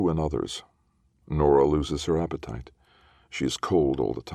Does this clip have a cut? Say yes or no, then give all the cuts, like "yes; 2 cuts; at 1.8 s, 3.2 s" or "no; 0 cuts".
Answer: no; 0 cuts